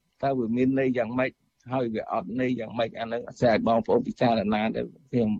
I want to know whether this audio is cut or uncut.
uncut